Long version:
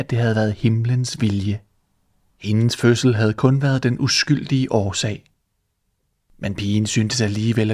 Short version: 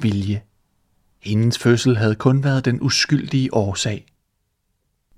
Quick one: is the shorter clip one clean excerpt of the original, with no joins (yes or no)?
yes